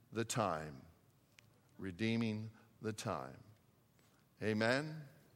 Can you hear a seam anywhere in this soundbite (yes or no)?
no